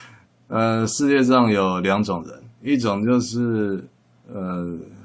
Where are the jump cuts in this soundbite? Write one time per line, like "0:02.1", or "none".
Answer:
none